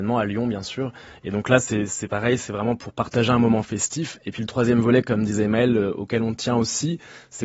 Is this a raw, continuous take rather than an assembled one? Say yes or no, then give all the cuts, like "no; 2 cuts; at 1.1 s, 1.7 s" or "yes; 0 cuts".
yes; 0 cuts